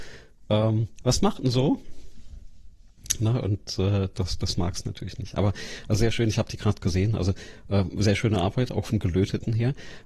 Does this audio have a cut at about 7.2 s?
no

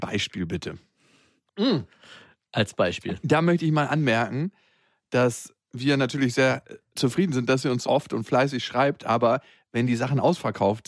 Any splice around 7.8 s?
yes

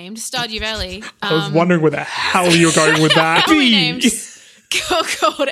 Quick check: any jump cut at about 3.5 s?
yes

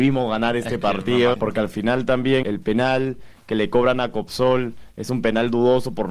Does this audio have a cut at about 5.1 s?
no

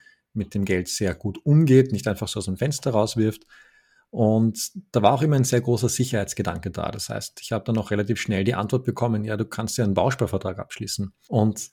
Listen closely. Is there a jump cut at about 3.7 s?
no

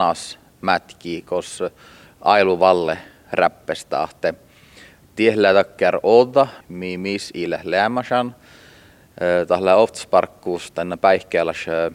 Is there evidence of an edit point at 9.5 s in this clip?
no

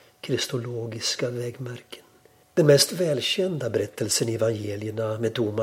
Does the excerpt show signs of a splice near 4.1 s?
no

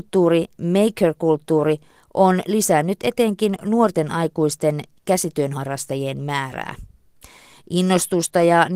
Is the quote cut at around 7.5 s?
no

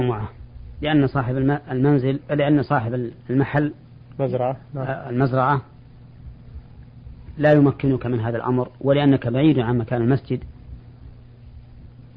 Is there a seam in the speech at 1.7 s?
no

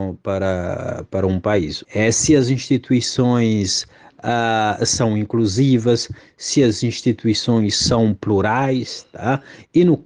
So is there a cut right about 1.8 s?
yes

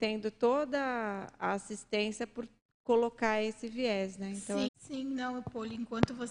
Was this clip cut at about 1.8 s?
no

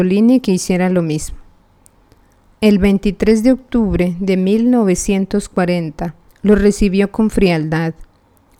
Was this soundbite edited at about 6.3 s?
yes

